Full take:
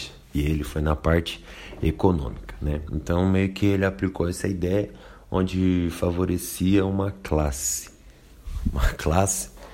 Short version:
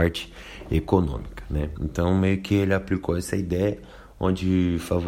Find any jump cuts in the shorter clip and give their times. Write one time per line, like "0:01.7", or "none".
none